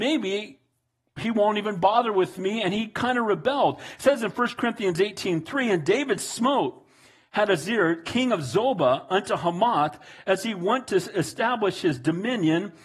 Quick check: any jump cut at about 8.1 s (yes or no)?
no